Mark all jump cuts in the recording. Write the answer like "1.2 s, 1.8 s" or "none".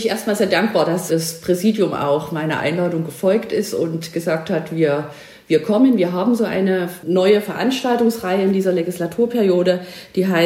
1.1 s